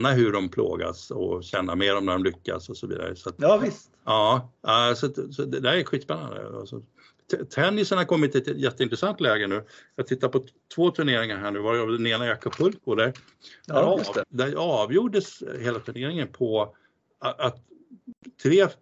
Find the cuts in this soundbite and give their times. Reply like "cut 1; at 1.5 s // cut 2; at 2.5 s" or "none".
cut 1; at 14.2 s

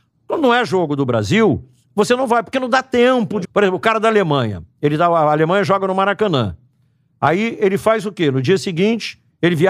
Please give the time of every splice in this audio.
cut 1; at 3.4 s

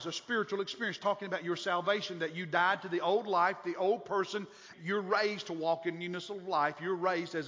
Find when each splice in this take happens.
cut 1; at 4.7 s

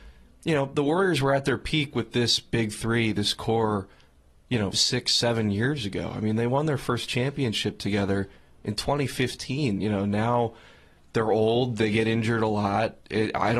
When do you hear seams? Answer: cut 1; at 4.7 s // cut 2; at 9.8 s

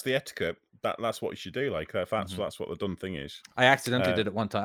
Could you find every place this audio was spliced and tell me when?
none

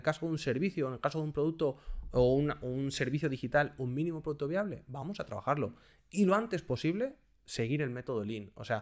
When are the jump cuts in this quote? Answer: none

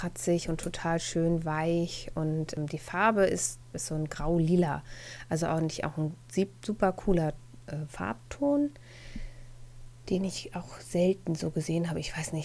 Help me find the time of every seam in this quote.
cut 1; at 3.7 s

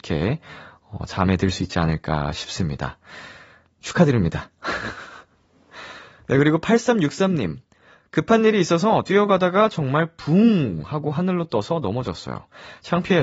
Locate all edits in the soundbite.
none

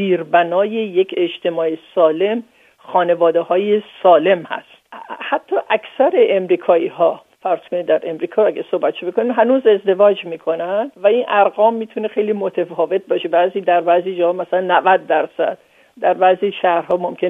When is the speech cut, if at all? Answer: cut 1; at 10.9 s

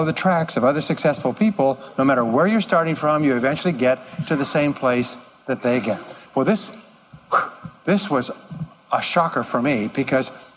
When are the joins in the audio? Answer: none

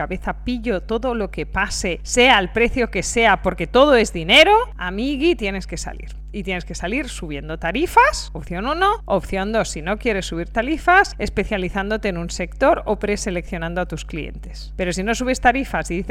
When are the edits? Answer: none

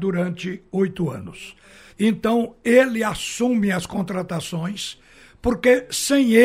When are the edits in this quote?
cut 1; at 1.9 s

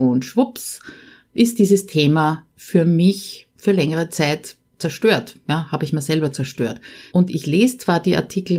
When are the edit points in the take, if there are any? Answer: cut 1; at 7.1 s

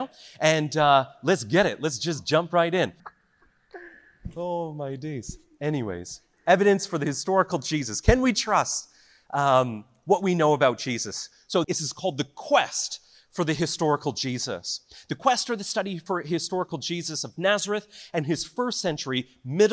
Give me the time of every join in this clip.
cut 1; at 3.0 s // cut 2; at 11.6 s

